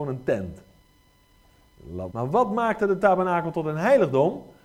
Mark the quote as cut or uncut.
cut